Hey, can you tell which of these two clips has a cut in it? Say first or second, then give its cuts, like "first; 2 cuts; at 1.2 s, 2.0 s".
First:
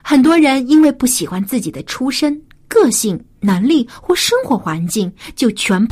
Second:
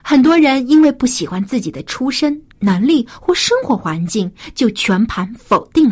second; 1 cut; at 2.5 s